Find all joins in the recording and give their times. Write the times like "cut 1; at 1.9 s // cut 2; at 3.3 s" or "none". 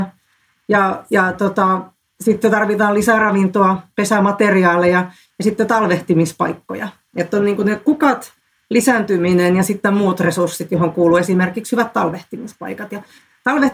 none